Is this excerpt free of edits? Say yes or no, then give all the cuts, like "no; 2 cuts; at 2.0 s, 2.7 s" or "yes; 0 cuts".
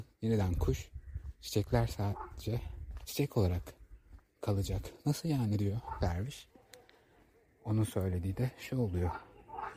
yes; 0 cuts